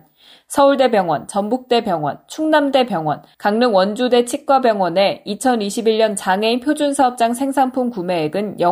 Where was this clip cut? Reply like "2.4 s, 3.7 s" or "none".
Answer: 3.3 s